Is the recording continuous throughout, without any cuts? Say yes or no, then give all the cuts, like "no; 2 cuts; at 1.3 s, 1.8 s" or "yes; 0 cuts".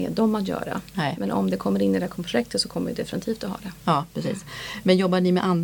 yes; 0 cuts